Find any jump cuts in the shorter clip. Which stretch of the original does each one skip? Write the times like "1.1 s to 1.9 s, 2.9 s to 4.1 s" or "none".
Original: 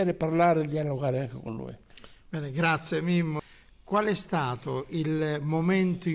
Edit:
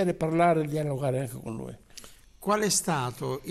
2.2 s to 3.7 s

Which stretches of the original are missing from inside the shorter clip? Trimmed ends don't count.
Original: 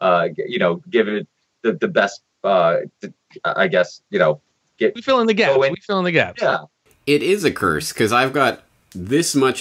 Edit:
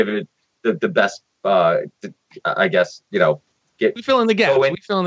none

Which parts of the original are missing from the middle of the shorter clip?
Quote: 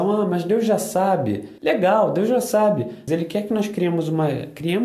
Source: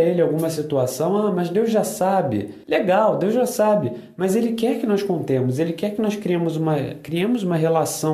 4.1 s to 5.6 s

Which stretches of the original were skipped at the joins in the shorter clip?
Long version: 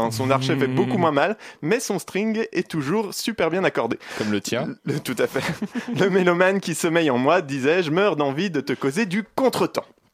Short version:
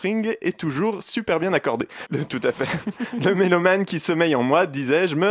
4.1 s to 4.8 s

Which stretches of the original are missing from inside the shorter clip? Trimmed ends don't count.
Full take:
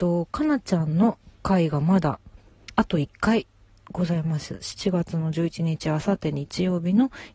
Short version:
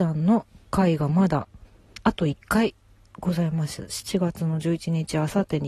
none

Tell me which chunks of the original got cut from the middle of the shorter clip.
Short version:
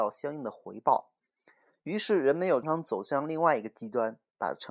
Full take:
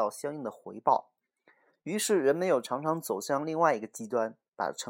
2.6 s to 2.8 s

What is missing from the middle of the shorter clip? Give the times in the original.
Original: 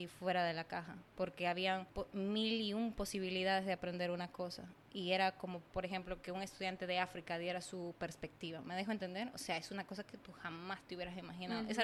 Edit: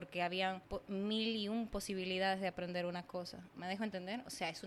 4.8 s to 8.6 s

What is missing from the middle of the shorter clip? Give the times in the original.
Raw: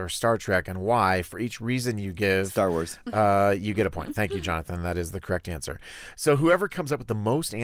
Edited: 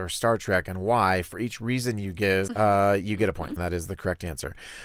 2.5 s to 3.1 s, 4.1 s to 4.8 s

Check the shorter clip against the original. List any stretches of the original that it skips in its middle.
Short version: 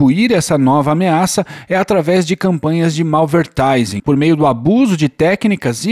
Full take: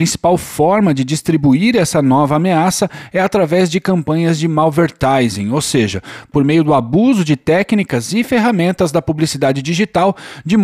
5.4 s to 6.3 s

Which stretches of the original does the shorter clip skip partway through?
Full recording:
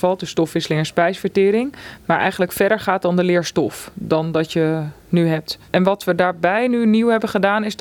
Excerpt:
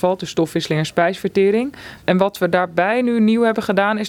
2.0 s to 5.6 s

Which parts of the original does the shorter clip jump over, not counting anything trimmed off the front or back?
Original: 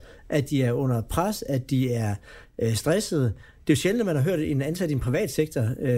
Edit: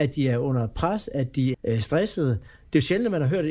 1.9 s to 2.5 s

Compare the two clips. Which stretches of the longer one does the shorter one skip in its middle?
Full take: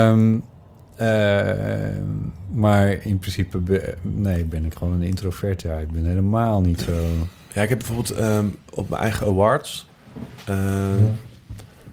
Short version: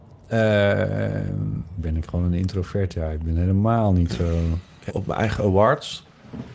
2.5 s to 4.5 s, 7.6 s to 8.7 s

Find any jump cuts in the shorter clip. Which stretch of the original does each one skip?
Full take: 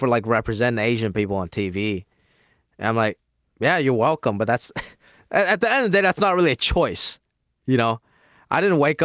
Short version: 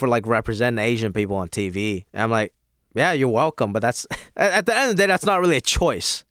2.1 s to 2.7 s, 5.0 s to 5.2 s

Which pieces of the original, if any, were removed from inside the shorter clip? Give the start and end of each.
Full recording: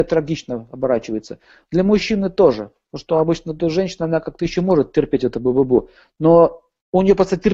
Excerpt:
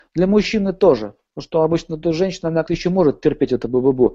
4.2 s to 4.4 s

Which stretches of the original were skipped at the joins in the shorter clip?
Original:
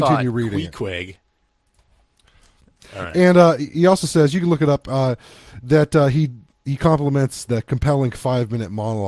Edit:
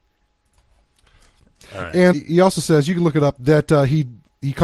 3.3 s to 3.6 s, 4.8 s to 5.6 s

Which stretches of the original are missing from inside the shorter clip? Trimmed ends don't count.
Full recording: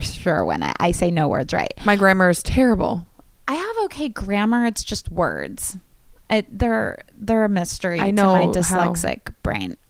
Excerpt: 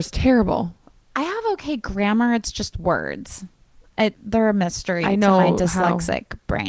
6.5 s to 7.1 s

